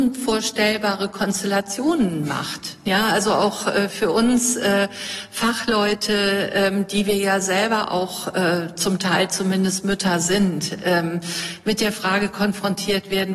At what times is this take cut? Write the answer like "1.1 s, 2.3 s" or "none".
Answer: none

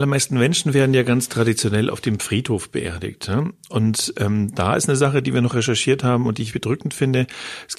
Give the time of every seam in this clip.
6.5 s

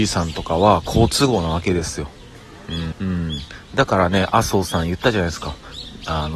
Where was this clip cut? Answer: 2.9 s

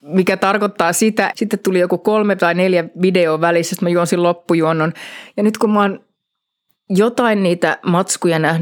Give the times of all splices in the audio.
1.3 s

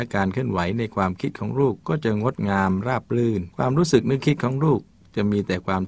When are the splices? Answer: 3.5 s

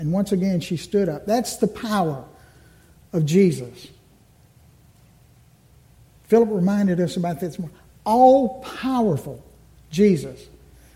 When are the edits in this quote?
none

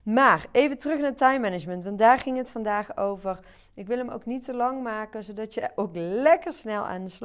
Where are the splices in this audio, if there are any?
none

